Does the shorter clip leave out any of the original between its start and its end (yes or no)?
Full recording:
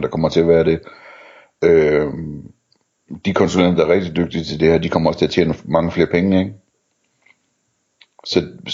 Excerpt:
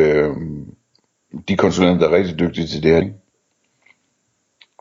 yes